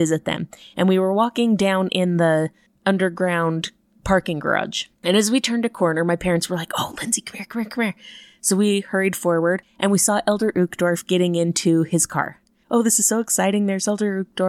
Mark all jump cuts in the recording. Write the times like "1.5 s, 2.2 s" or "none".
4.9 s

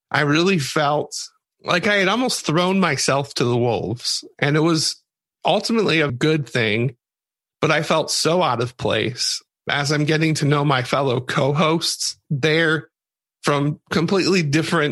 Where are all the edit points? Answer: 6.1 s

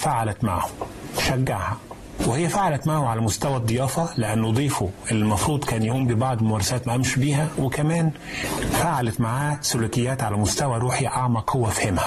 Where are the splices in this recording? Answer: none

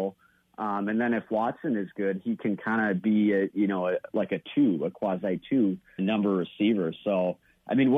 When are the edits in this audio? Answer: 6.0 s

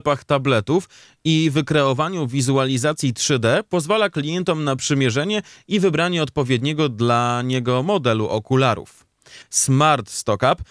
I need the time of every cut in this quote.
9.4 s

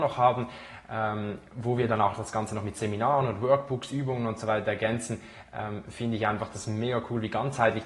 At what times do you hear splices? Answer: none

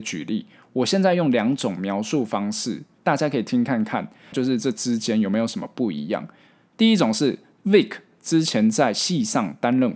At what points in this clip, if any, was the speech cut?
4.3 s

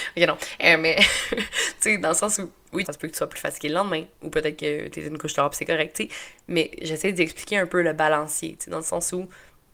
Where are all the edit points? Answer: 2.8 s

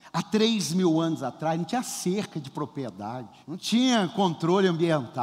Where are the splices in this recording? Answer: 3.4 s

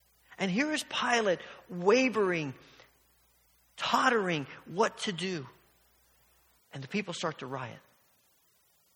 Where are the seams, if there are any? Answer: 6.6 s

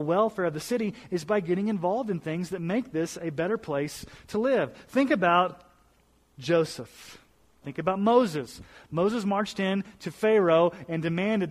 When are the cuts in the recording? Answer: 7.6 s

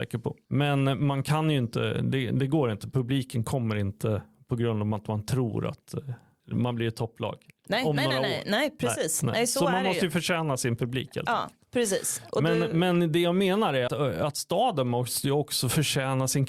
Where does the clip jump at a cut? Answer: 13.9 s

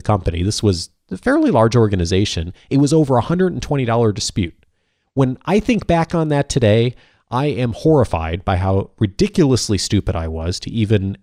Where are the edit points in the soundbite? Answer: none

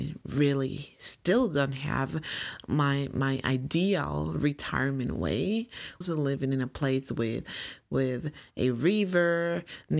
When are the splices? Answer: 6.0 s

